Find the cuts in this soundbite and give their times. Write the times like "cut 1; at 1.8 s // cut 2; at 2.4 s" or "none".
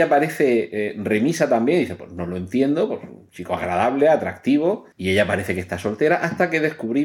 cut 1; at 4.9 s